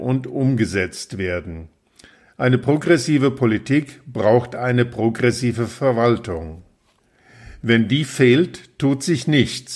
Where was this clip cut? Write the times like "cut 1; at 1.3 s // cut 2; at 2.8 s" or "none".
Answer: none